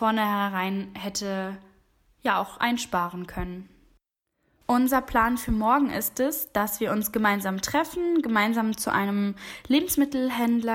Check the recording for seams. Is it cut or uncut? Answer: cut